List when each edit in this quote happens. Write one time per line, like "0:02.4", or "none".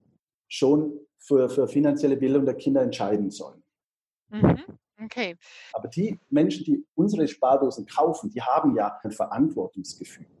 0:05.7
0:09.0